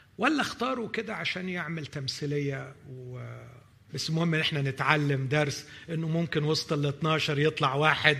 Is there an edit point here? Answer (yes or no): yes